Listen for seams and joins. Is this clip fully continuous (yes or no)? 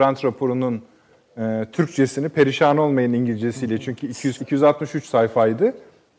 no